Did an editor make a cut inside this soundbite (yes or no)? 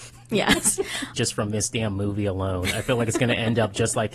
yes